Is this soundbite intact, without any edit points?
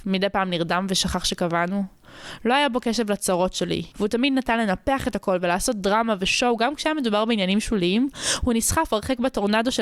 no; 1 cut; at 3.9 s

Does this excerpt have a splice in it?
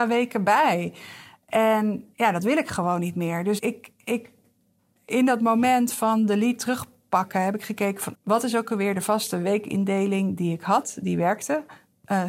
yes; 2 cuts; at 3.6 s, 8.1 s

